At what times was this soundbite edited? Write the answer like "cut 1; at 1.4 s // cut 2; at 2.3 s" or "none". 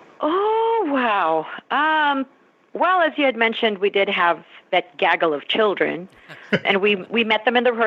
cut 1; at 6.6 s